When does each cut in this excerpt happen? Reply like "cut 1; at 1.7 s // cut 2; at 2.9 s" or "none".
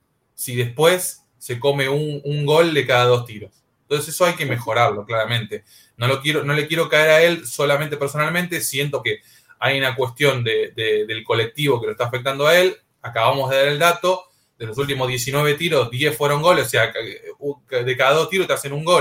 cut 1; at 9.0 s